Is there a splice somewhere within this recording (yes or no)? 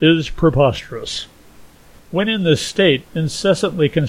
yes